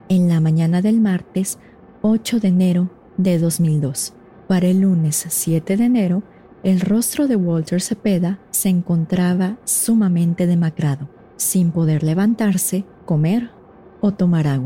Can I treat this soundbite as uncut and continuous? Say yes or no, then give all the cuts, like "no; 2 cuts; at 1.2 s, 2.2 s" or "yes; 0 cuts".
no; 3 cuts; at 4.3 s, 11.3 s, 13.0 s